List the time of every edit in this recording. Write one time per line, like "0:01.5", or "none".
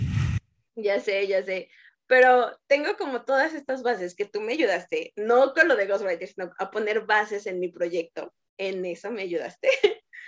none